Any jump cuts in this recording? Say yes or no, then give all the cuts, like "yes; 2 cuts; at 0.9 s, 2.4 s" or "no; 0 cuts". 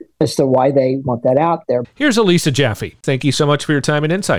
yes; 2 cuts; at 1.8 s, 3.0 s